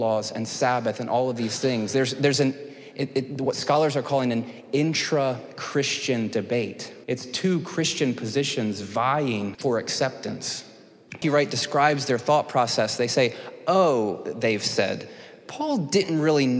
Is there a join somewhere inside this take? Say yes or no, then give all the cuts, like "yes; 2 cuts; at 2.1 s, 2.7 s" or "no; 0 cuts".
yes; 2 cuts; at 7.0 s, 11.2 s